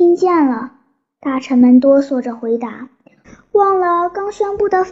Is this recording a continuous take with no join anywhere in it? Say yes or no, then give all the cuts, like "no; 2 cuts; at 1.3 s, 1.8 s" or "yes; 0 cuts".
yes; 0 cuts